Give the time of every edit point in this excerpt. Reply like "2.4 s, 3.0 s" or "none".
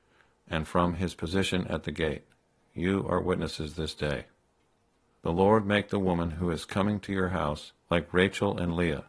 5.2 s, 7.8 s

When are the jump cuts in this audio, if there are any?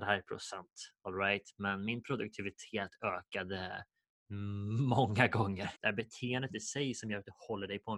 5.7 s

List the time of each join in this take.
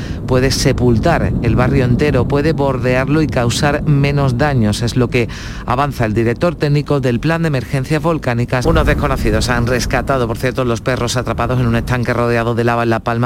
8.6 s

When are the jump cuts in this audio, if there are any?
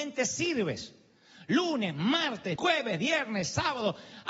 2.6 s

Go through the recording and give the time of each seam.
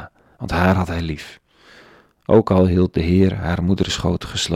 none

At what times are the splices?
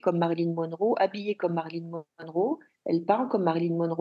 none

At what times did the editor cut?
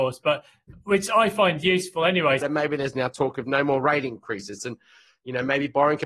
2.4 s, 4.6 s

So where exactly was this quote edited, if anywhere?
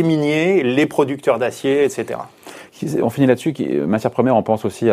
none

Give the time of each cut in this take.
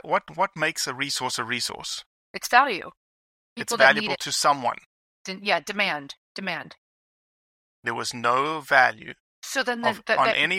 9.2 s

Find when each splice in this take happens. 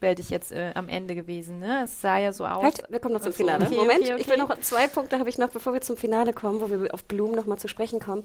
none

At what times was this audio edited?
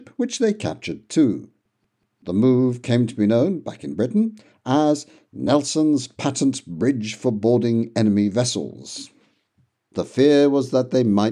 9.8 s

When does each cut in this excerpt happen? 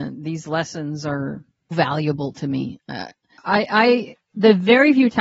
1.7 s

